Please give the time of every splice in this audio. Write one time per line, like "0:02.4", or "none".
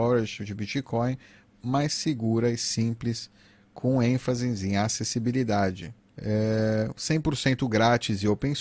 0:06.1